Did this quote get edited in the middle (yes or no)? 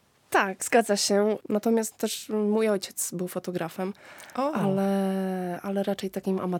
yes